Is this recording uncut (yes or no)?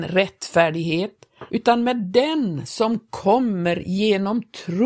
no